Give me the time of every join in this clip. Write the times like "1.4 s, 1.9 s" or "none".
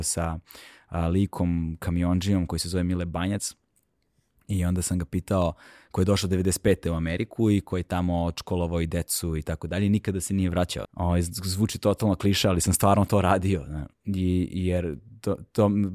10.8 s, 13.9 s